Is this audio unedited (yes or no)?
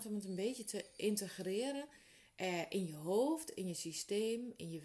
yes